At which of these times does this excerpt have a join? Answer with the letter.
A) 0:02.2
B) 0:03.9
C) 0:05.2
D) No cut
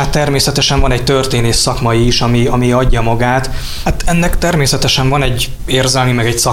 B